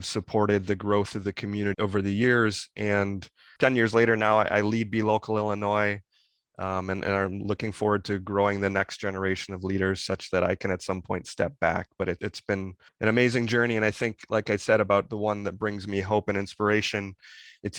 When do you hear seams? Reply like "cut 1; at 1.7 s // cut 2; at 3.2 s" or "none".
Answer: none